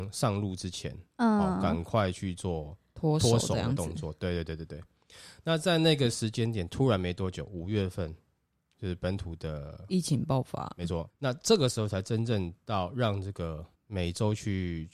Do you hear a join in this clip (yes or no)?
yes